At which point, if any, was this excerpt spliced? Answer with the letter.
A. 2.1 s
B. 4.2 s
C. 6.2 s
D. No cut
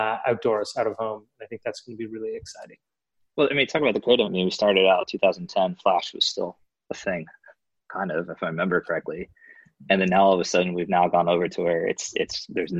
B